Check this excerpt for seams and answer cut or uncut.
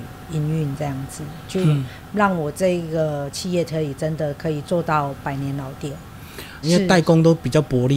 cut